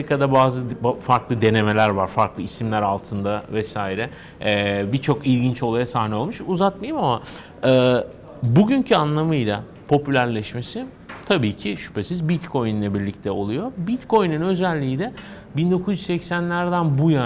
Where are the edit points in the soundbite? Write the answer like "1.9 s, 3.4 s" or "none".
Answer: none